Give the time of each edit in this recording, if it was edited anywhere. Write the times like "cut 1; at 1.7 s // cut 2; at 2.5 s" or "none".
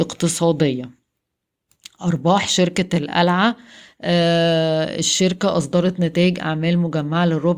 none